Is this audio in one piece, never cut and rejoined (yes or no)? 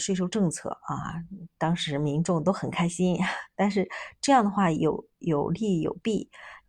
yes